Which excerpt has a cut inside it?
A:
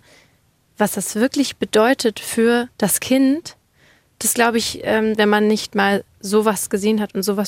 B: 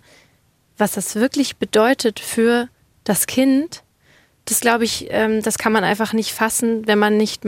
A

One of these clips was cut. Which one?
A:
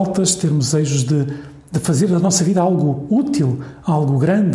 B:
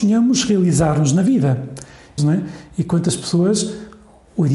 B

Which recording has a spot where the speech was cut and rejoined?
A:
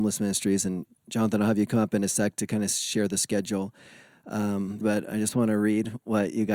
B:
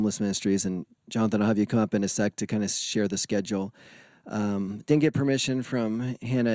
A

